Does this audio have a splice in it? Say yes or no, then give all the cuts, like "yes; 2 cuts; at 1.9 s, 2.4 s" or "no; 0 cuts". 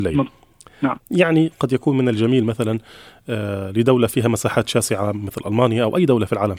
yes; 1 cut; at 1.0 s